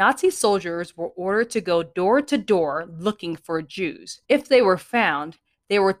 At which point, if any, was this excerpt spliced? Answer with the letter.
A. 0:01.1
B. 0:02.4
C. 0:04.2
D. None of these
C